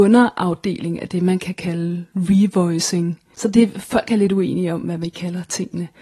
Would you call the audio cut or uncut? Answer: cut